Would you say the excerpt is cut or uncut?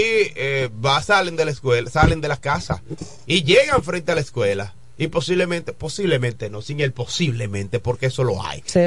uncut